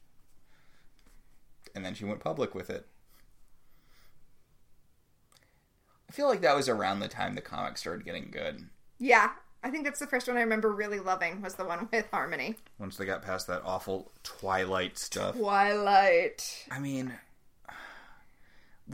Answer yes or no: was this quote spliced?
no